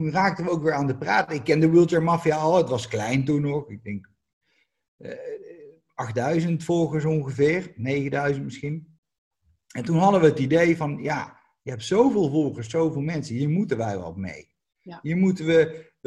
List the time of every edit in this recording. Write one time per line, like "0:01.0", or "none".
none